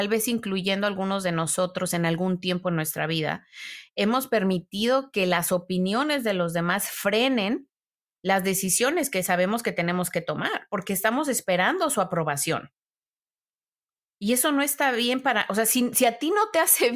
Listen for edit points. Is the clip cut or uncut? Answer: uncut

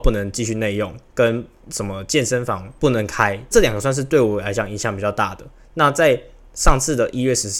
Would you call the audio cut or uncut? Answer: cut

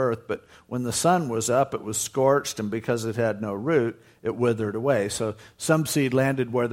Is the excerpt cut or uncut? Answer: uncut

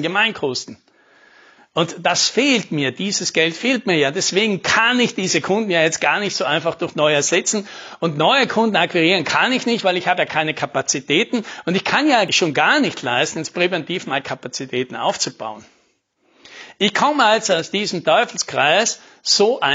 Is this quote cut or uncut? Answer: uncut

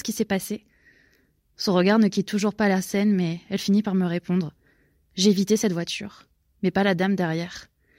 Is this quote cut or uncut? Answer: uncut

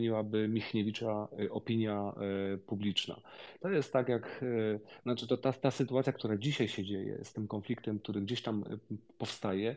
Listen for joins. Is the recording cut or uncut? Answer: uncut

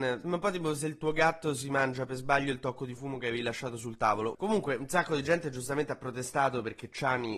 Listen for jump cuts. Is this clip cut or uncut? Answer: cut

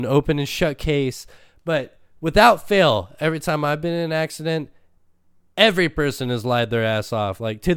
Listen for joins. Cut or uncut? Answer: uncut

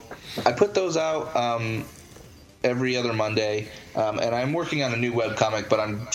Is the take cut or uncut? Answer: uncut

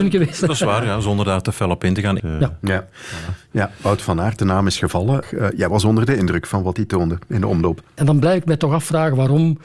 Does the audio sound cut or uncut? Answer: cut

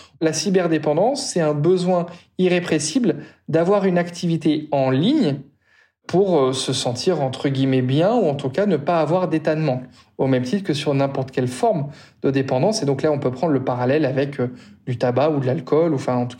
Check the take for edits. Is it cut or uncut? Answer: uncut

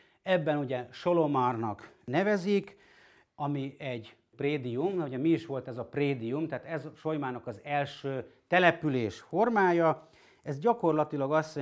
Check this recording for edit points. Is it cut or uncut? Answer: uncut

